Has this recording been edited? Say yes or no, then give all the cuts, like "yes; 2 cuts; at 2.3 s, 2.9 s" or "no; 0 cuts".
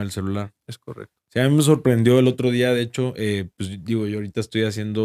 no; 0 cuts